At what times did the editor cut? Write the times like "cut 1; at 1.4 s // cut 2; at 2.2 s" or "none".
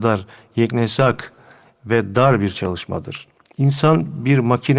none